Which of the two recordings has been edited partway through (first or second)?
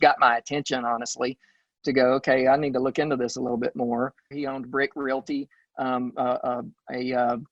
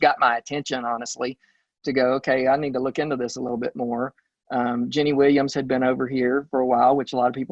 first